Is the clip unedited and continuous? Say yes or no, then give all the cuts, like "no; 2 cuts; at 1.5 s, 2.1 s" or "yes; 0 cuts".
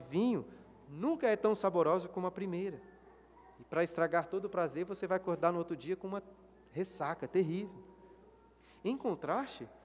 yes; 0 cuts